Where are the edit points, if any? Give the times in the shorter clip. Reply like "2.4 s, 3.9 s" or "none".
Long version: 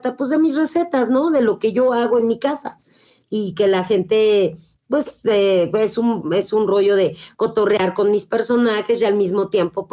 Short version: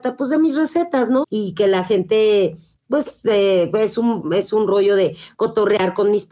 1.2 s